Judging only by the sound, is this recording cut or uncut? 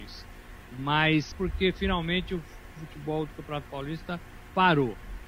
cut